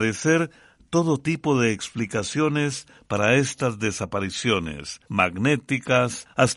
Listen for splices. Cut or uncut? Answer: cut